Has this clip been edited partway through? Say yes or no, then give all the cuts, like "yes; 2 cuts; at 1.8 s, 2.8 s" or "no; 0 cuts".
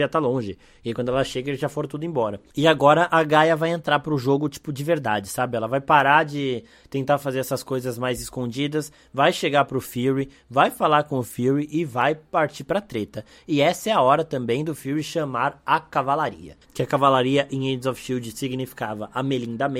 yes; 1 cut; at 16.6 s